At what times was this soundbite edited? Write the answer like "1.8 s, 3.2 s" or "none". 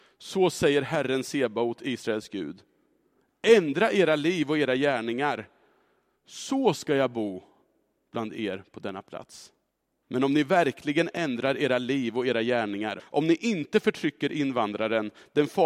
10.0 s, 13.0 s